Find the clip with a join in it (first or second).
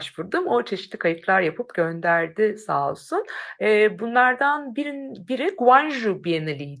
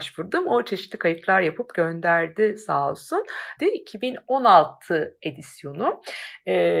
second